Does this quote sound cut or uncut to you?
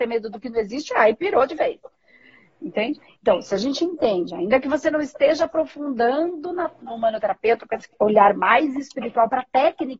cut